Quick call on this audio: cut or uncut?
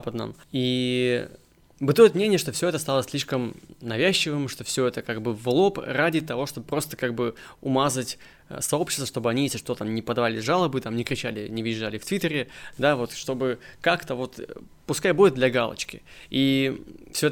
uncut